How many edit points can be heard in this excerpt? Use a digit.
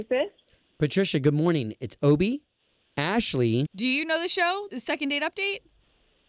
2